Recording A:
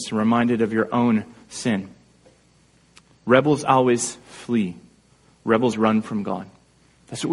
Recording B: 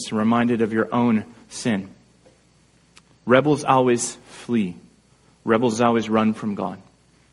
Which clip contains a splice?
A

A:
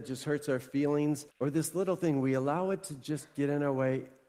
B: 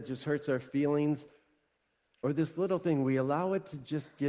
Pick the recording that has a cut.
A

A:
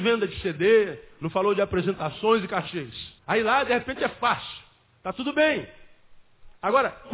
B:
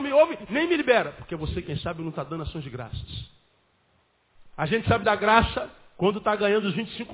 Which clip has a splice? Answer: A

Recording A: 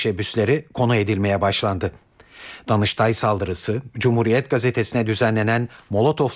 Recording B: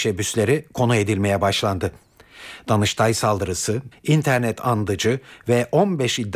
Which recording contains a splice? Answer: B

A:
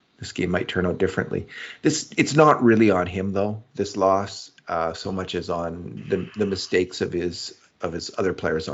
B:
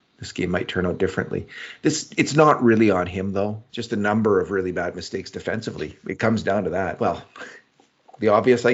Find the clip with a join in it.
B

